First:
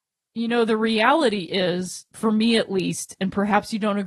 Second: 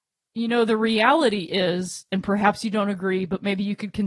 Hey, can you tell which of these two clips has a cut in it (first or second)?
second